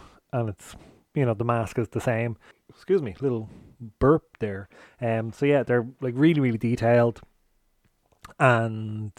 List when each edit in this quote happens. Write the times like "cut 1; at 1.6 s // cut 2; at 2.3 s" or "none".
cut 1; at 2.5 s